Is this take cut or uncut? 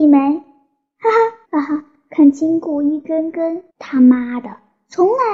cut